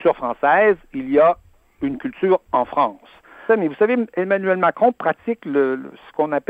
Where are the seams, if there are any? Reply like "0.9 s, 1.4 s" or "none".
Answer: 3.5 s